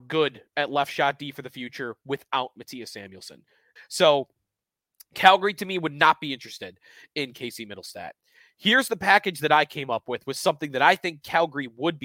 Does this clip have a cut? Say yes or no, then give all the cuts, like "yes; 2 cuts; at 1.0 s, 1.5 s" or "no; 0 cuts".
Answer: yes; 1 cut; at 3.8 s